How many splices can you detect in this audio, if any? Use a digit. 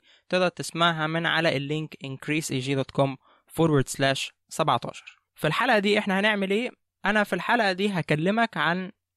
1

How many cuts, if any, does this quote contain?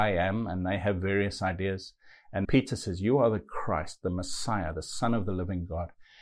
1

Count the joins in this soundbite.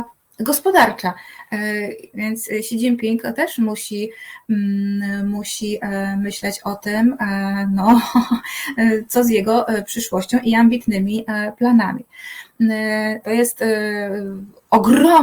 2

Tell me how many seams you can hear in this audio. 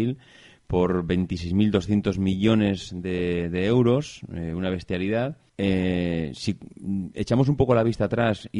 1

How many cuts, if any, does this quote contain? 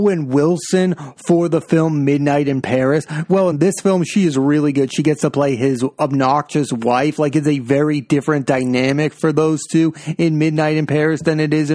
0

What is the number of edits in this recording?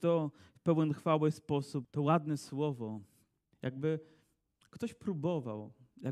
2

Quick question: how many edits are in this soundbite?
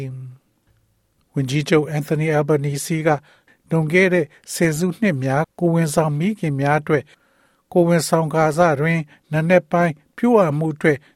1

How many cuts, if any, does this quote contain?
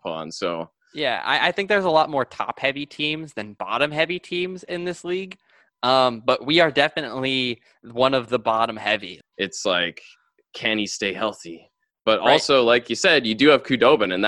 1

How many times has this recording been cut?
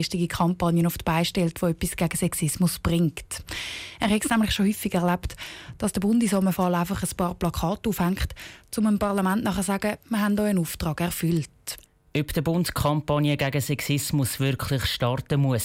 2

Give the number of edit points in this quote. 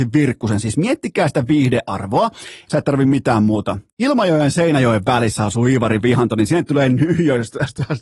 2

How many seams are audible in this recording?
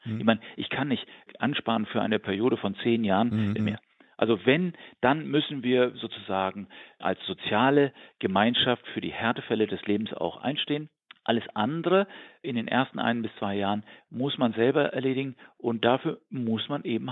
2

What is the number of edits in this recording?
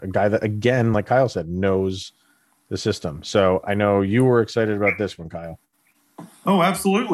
0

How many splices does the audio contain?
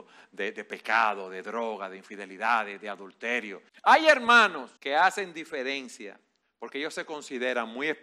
2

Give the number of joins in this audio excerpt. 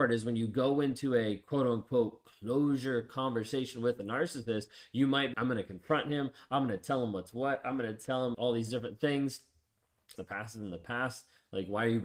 3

